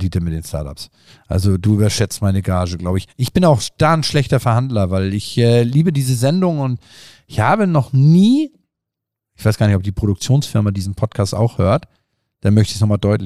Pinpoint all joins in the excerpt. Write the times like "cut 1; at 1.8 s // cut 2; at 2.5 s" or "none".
none

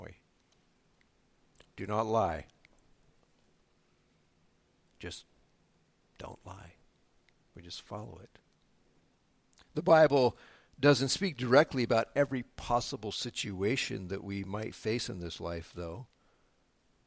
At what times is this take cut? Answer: none

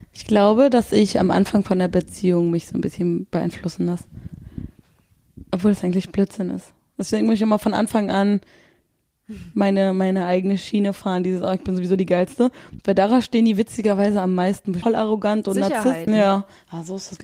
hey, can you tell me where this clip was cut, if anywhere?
cut 1; at 14.8 s // cut 2; at 16.1 s

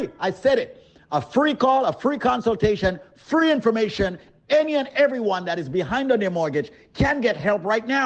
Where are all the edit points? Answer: none

